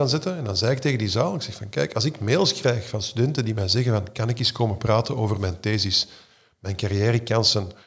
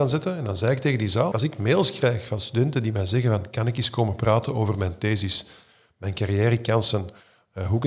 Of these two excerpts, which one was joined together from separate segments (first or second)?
second